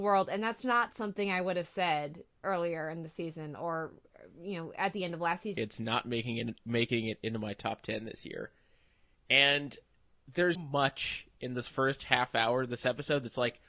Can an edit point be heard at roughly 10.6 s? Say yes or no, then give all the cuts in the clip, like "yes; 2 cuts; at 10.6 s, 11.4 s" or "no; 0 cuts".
yes; 2 cuts; at 5.6 s, 10.6 s